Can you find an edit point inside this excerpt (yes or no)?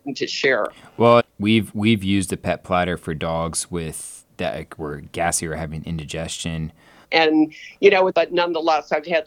yes